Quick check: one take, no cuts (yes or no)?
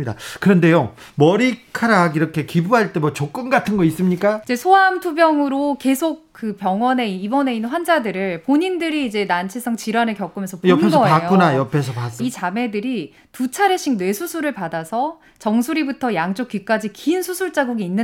no